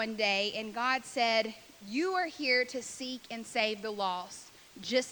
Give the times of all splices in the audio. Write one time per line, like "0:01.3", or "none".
none